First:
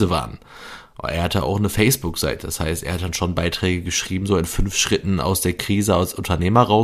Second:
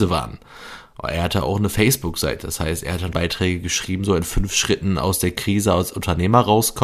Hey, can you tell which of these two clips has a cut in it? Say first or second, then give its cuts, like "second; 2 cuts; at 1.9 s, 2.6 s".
second; 1 cut; at 3.1 s